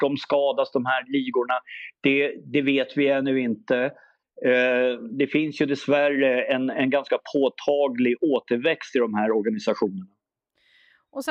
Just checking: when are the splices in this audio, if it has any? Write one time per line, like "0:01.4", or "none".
none